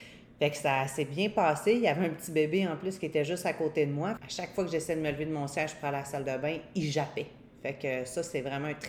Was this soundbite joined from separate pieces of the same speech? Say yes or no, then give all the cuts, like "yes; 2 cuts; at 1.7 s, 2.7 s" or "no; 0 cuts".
yes; 1 cut; at 4.2 s